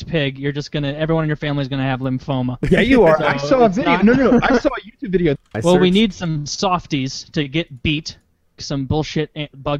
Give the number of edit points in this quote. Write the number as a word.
two